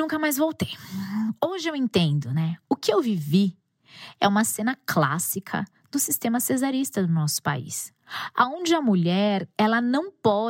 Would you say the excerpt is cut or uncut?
uncut